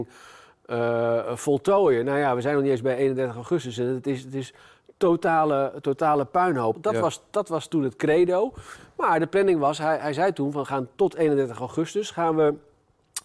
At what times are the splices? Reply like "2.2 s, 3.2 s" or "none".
6.7 s